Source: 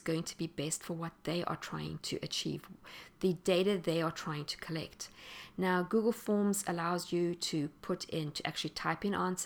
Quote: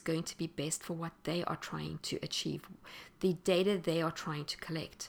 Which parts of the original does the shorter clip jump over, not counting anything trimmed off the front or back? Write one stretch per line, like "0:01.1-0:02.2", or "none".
none